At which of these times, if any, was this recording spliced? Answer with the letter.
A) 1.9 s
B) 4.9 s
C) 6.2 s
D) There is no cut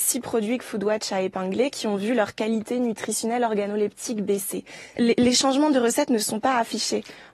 B